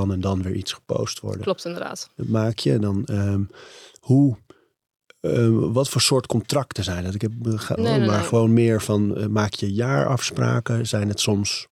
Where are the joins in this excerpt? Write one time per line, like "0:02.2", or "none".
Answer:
0:07.8